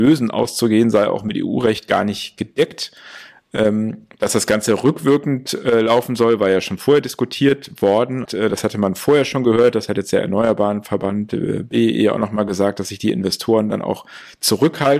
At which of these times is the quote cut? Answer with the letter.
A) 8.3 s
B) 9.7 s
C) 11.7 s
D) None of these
A